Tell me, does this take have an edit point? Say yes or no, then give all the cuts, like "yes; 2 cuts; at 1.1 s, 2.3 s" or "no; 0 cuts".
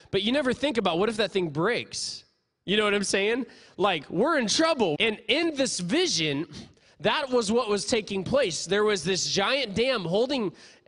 yes; 1 cut; at 4.9 s